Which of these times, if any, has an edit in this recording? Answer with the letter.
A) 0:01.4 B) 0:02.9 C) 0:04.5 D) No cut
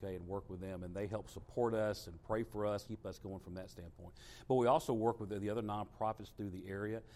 B